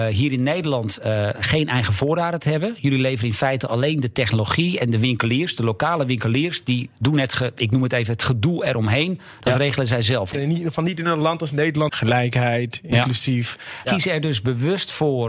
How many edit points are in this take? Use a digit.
3